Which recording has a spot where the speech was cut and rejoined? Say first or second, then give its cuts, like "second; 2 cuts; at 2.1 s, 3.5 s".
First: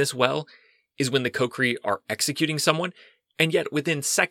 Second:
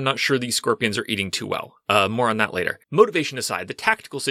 second; 1 cut; at 2.8 s